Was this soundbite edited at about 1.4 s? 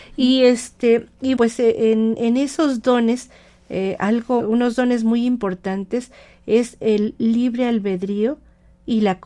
yes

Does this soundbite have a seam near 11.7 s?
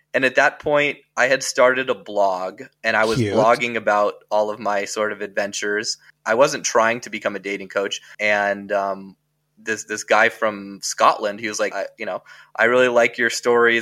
yes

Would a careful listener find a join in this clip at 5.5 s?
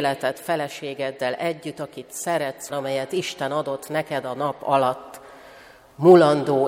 no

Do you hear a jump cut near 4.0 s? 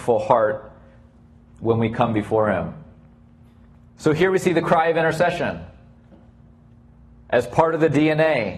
yes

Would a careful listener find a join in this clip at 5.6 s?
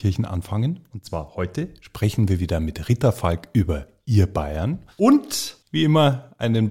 yes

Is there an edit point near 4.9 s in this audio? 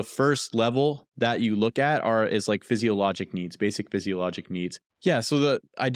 yes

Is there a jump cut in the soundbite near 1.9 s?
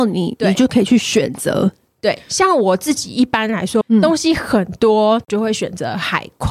no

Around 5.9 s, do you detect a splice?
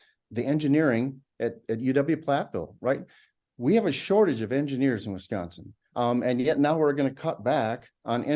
yes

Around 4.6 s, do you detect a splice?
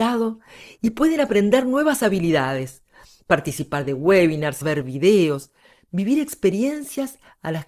yes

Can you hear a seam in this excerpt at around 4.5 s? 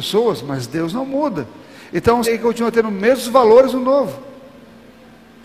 no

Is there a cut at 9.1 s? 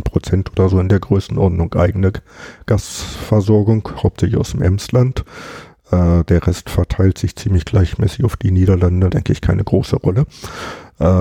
yes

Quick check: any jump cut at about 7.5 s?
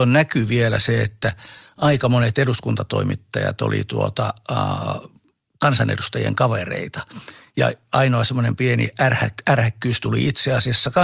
no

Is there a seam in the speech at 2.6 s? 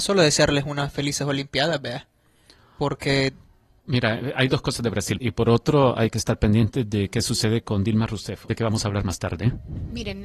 no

